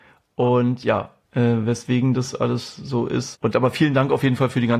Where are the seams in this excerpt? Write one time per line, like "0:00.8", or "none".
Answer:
0:01.2
0:03.3